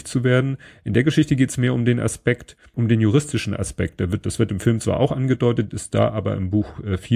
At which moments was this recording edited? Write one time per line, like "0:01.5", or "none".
0:02.7